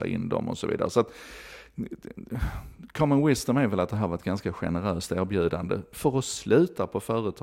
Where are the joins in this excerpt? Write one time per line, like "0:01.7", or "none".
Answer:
none